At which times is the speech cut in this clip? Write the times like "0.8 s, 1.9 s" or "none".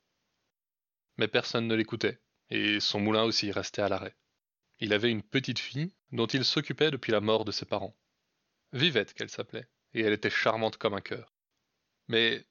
4.6 s